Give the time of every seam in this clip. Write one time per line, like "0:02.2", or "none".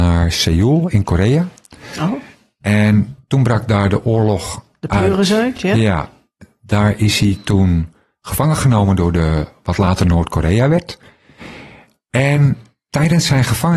none